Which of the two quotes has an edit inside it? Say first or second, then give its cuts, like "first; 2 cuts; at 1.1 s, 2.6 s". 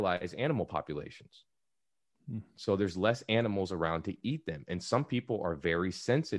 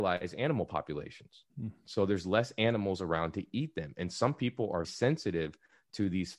second; 2 cuts; at 1.5 s, 4.8 s